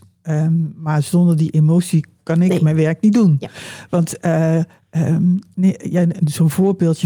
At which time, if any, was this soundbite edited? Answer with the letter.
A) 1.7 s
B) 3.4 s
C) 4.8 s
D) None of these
D